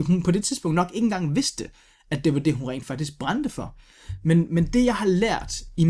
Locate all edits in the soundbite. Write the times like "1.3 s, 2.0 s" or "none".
none